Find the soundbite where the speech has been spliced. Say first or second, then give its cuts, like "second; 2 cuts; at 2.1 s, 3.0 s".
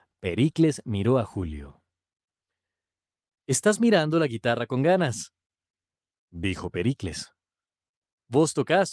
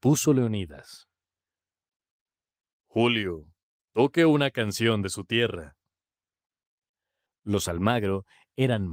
second; 1 cut; at 7.3 s